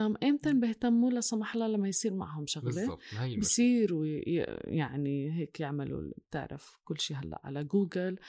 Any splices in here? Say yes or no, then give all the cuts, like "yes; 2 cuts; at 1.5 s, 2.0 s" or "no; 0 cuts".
no; 0 cuts